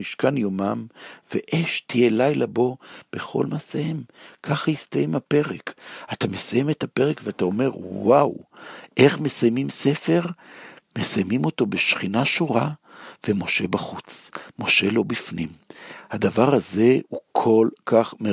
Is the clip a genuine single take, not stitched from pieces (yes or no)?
no